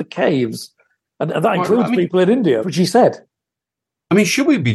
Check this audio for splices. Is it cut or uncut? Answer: cut